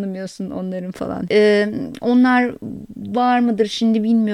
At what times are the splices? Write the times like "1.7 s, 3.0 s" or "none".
1.3 s